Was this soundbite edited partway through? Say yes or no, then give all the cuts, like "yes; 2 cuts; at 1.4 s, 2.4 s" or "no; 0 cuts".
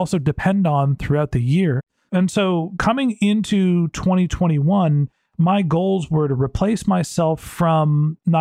yes; 1 cut; at 2.1 s